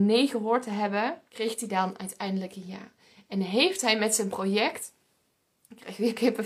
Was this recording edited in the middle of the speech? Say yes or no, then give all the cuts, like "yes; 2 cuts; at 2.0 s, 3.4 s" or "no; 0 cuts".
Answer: yes; 1 cut; at 1.3 s